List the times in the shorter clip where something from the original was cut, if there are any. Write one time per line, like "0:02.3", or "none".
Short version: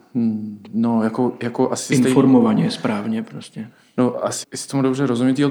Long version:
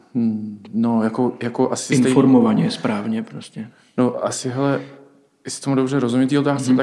0:04.4